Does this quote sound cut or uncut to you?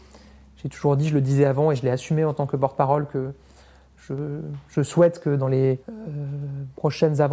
cut